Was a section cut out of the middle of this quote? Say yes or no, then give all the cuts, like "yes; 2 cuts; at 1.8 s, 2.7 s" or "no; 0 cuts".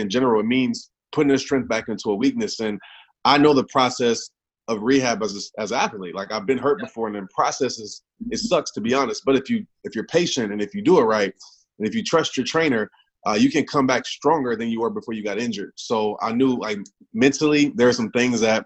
yes; 1 cut; at 15.7 s